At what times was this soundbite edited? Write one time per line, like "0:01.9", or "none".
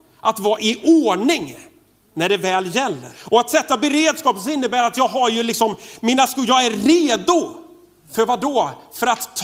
0:03.1